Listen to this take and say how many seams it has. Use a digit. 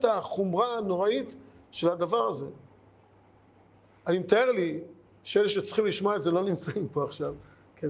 0